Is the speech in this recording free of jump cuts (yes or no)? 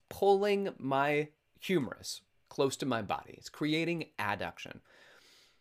yes